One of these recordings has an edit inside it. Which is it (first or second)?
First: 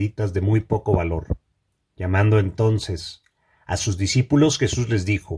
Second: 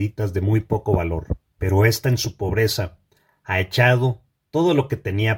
second